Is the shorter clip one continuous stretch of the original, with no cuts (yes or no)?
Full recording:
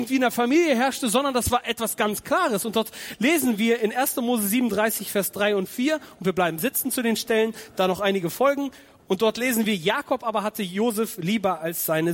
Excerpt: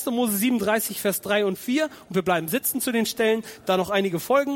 yes